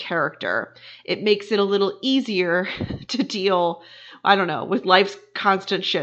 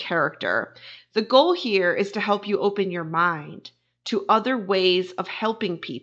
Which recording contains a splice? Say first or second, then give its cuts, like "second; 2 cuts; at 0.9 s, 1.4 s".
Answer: second; 1 cut; at 1.0 s